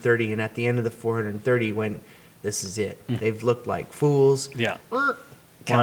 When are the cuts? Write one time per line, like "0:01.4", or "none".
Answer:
0:03.2
0:04.9

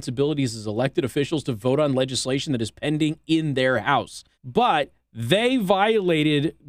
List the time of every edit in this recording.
0:04.3

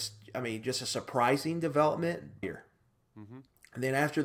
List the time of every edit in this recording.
0:02.4

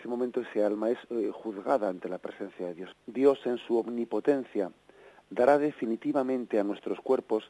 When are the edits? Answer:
0:02.9

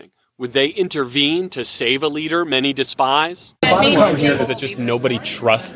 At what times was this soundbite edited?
none

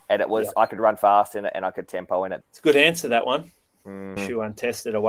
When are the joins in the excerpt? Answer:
0:02.4
0:04.2

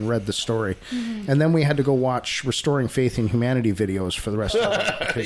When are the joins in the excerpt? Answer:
none

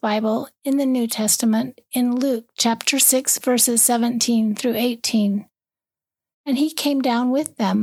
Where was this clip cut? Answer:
none

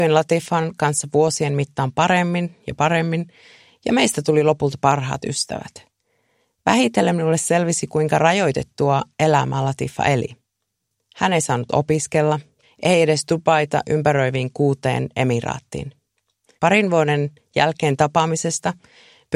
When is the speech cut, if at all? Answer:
0:12.6
0:16.6

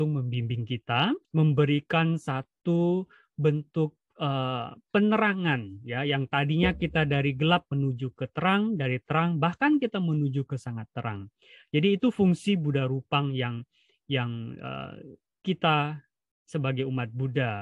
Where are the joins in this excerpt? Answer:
0:01.2

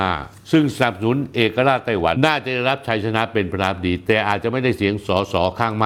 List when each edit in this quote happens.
0:02.2

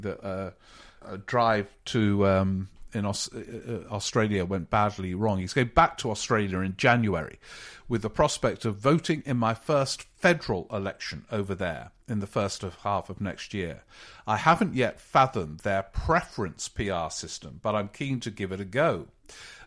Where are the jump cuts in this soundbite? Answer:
0:01.0

